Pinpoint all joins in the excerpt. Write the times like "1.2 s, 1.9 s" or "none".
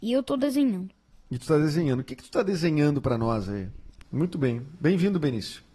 4.0 s